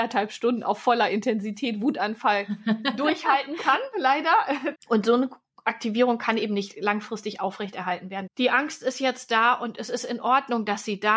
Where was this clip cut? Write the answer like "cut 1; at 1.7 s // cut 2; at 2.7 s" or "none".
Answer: cut 1; at 4.8 s // cut 2; at 8.3 s